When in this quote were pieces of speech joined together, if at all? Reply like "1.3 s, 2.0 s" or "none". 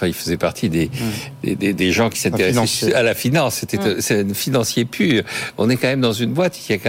none